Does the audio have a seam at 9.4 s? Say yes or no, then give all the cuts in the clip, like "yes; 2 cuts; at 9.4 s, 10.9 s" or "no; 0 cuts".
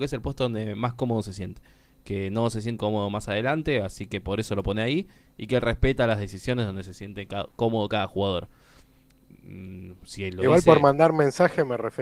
no; 1 cut; at 2.8 s